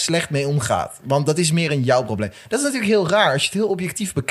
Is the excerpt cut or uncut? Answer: uncut